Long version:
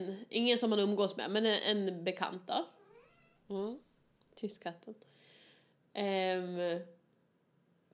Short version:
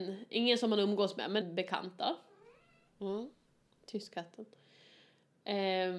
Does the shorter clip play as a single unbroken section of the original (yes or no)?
no